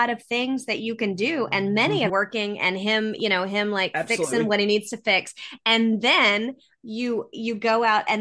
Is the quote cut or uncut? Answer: cut